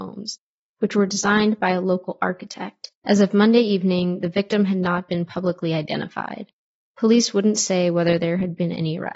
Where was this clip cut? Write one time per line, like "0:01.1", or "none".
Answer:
0:02.9